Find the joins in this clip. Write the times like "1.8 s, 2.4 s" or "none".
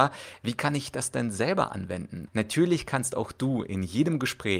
2.3 s